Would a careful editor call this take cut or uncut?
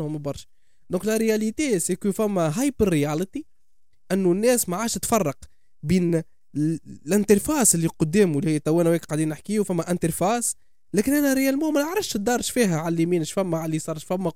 uncut